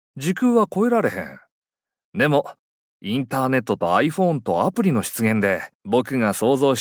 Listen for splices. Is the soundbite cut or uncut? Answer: cut